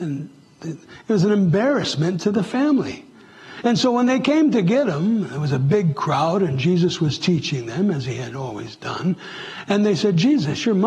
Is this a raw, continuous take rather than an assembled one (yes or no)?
yes